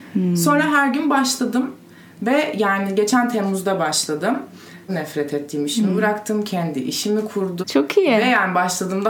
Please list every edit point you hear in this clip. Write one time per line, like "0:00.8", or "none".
0:04.9
0:07.6